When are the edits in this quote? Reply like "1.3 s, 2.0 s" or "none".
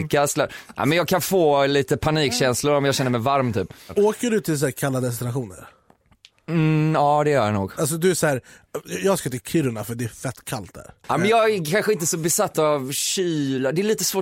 11.0 s